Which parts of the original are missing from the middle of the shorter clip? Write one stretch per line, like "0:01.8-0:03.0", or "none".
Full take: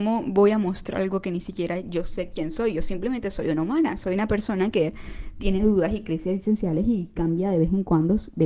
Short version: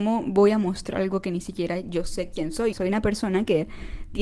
0:02.7-0:04.0